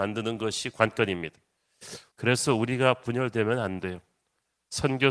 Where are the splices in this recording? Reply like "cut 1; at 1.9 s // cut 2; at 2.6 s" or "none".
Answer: cut 1; at 2.1 s